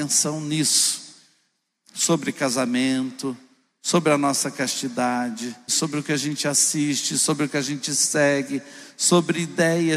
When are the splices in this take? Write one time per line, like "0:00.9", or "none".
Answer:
0:05.7